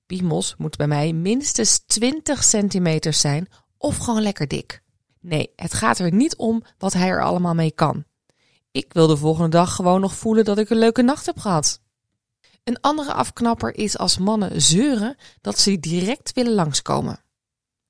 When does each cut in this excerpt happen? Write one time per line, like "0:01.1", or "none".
none